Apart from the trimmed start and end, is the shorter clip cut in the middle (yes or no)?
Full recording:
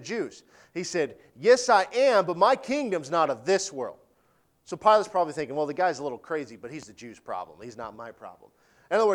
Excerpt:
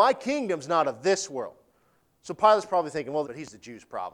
yes